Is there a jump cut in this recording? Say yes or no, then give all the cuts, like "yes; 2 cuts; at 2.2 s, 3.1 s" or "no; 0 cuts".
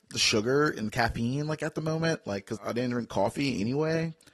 yes; 1 cut; at 2.6 s